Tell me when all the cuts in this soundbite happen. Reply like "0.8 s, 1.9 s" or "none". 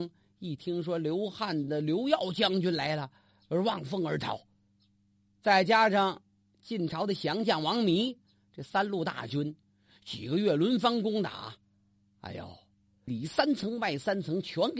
13.1 s